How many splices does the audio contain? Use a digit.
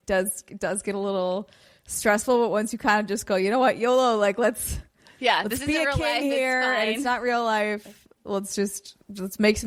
0